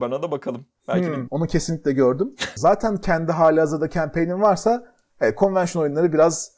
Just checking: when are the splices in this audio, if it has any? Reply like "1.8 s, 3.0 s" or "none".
1.3 s, 2.6 s